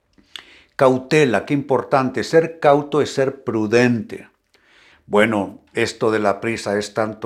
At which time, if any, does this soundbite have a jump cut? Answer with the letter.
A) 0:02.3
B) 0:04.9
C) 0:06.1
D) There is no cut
B